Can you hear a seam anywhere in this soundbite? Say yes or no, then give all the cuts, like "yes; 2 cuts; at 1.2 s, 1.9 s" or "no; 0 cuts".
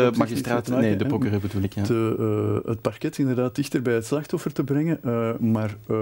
no; 0 cuts